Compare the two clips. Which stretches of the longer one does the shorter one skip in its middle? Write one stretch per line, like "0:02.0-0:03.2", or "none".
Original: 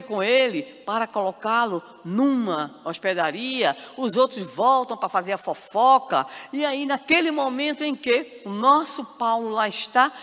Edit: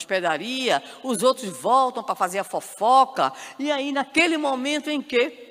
none